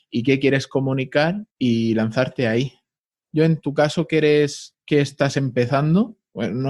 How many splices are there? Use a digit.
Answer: 3